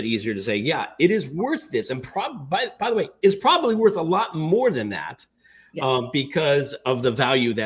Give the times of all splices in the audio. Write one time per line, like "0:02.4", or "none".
none